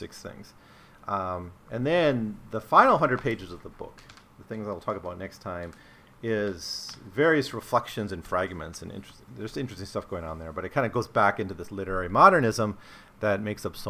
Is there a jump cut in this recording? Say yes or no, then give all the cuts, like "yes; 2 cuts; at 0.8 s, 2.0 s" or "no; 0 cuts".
no; 0 cuts